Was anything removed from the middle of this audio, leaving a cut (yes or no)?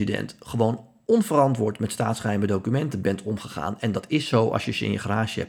no